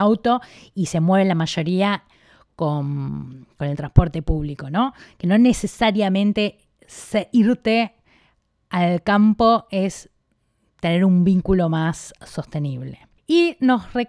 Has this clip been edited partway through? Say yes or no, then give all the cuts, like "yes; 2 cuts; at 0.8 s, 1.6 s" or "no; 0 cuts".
no; 0 cuts